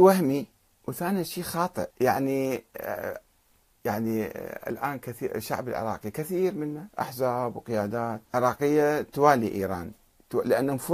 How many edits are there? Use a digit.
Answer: 2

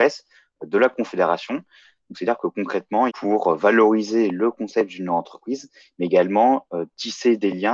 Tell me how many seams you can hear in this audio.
1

